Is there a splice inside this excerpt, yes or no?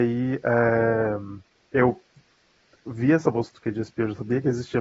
no